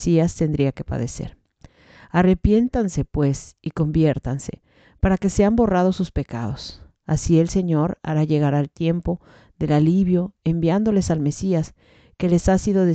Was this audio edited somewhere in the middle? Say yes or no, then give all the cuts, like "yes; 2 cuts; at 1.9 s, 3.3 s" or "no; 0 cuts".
no; 0 cuts